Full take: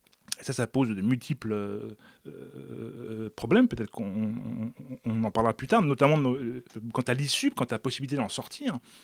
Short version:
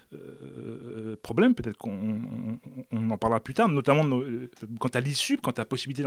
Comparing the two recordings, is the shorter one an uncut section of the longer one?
yes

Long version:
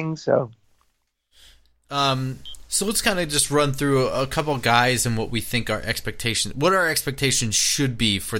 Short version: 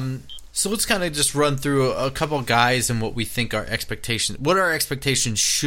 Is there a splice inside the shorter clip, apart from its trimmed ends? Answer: no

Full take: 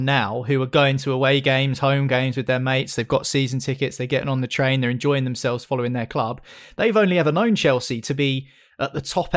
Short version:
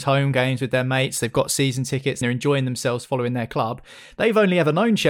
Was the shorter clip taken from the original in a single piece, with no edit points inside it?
no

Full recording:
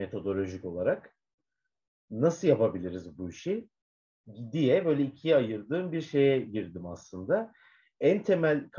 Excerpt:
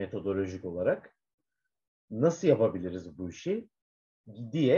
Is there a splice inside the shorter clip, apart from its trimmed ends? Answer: no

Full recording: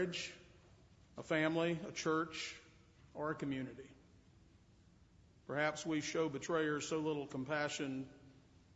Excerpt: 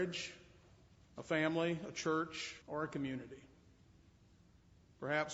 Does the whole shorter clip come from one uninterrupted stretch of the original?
no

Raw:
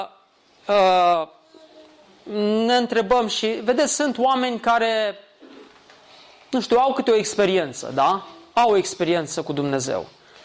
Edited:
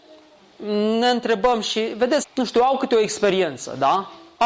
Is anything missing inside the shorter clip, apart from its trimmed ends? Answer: yes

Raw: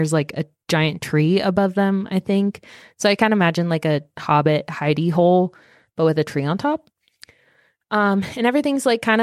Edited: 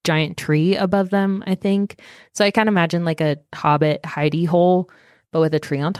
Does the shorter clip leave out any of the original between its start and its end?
no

